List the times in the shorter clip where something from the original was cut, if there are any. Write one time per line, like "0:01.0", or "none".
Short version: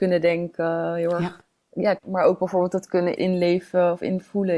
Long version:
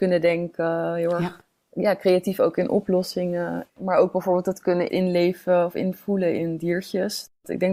0:02.0